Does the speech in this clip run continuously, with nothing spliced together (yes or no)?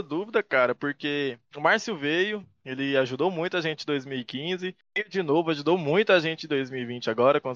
yes